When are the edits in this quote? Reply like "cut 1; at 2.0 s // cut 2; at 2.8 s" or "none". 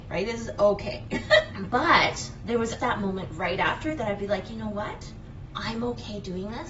cut 1; at 1.5 s // cut 2; at 2.8 s

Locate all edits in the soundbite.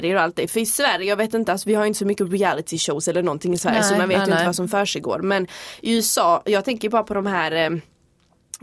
none

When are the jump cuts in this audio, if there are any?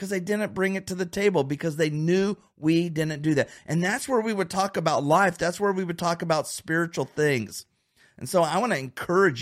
none

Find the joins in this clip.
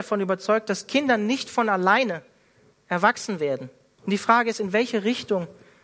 cut 1; at 4.0 s

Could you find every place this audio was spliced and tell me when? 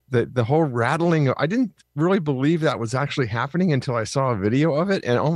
none

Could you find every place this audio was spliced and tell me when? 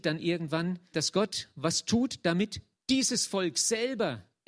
cut 1; at 0.9 s

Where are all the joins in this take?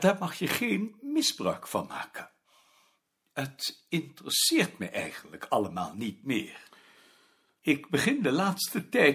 none

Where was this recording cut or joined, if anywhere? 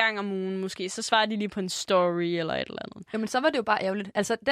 cut 1; at 3.1 s

